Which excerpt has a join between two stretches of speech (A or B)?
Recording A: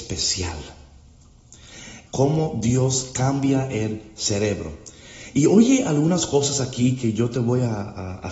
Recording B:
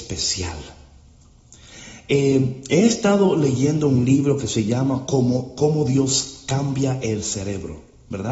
A